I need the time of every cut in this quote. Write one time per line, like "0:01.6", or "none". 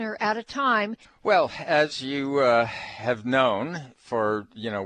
0:01.0